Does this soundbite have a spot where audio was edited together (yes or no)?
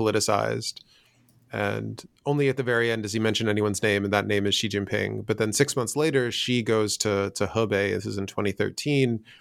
no